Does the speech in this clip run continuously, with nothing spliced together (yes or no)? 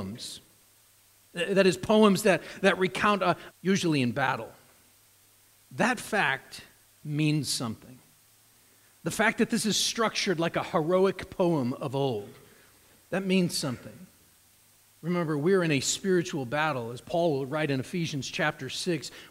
no